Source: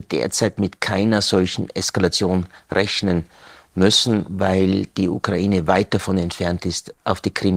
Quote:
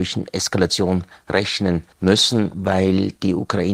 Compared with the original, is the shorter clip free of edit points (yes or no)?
no